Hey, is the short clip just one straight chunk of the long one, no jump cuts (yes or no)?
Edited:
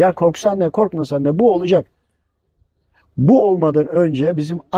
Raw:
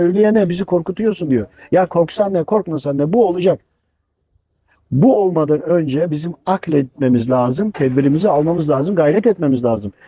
yes